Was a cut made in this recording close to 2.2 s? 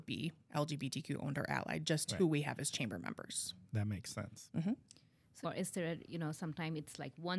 no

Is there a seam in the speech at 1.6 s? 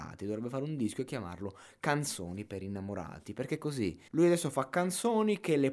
no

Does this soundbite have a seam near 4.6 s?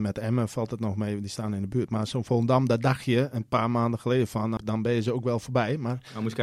yes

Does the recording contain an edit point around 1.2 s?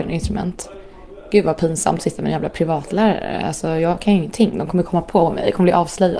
no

